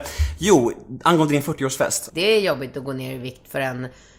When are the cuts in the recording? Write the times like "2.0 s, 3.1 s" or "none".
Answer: 2.1 s